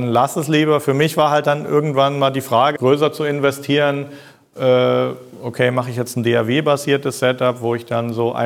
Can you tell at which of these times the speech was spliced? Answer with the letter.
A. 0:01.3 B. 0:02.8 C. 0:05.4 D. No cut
B